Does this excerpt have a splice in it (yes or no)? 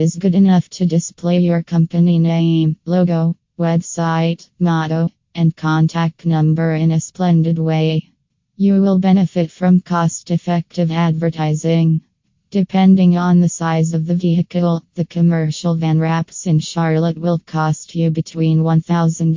no